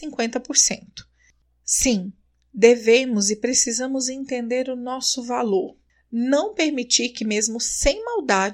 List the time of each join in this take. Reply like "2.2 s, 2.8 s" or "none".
none